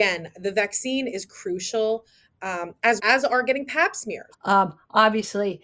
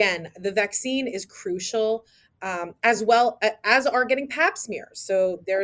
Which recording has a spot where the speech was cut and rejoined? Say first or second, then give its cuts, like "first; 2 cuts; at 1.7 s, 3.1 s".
first; 2 cuts; at 3.0 s, 4.3 s